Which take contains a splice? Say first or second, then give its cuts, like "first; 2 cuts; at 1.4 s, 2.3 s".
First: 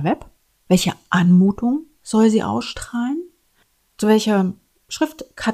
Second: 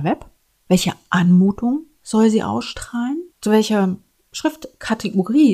second; 1 cut; at 3.3 s